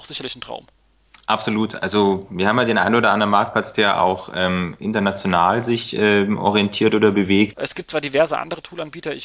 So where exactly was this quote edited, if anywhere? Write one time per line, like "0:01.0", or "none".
0:07.5